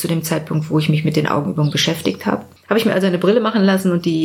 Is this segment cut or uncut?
cut